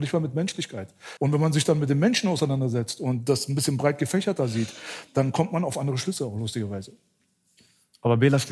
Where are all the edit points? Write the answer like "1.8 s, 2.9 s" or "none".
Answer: 1.2 s